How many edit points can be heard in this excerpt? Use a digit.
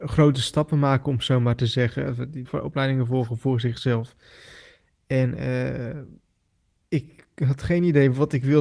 1